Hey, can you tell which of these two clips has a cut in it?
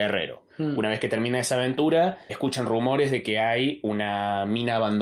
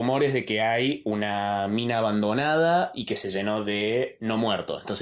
first; 1 cut; at 2.3 s

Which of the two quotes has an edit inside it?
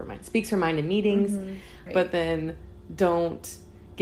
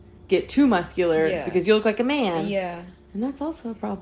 first; 1 cut; at 1.9 s

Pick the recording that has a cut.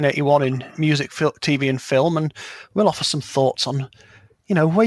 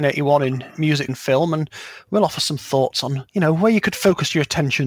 second; 2 cuts; at 1.1 s, 3.3 s

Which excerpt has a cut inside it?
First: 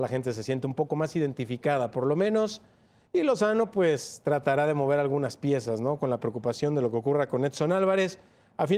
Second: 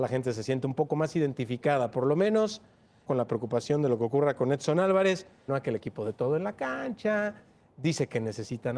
second; 2 cuts; at 3.1 s, 5.5 s

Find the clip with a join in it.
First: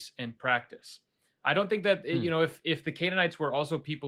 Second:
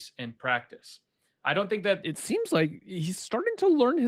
second; 1 cut; at 2.0 s

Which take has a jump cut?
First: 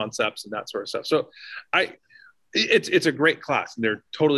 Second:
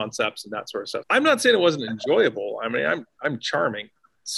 second; 1 cut; at 1.0 s

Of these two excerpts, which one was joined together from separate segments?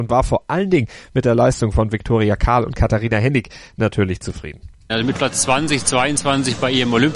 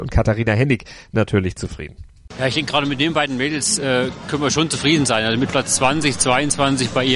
first; 1 cut; at 4.9 s

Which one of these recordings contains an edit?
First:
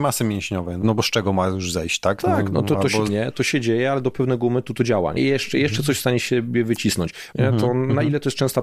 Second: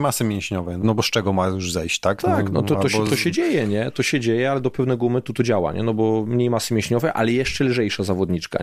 first; 3 cuts; at 3.1 s, 5.2 s, 7.3 s

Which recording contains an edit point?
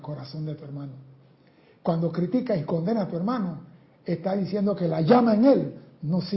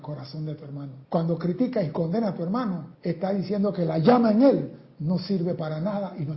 second; 2 cuts; at 1.0 s, 2.9 s

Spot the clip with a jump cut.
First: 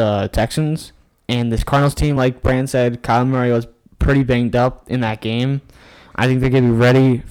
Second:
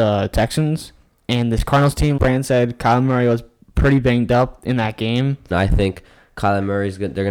second; 2 cuts; at 2.2 s, 5.5 s

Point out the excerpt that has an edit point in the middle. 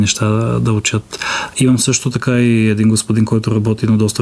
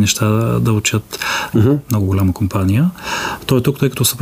second; 1 cut; at 1.5 s

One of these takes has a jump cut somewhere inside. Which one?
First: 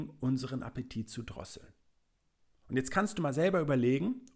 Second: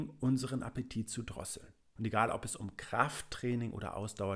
second; 1 cut; at 2.0 s

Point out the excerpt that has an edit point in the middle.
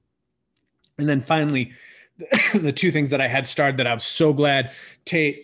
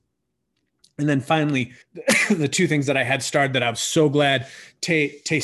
second; 1 cut; at 1.8 s

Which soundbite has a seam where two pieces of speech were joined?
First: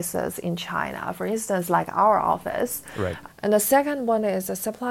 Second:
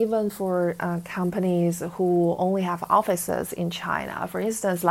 first; 1 cut; at 3.3 s

